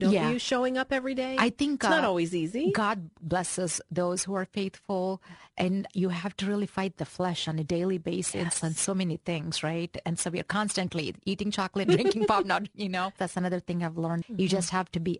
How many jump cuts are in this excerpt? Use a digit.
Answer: 3